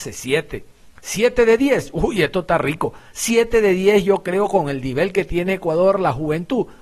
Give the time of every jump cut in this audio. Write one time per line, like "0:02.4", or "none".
none